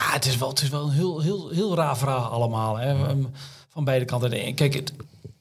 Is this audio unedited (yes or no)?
yes